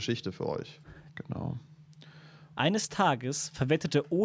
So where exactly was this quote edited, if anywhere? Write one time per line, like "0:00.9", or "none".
0:01.1
0:02.5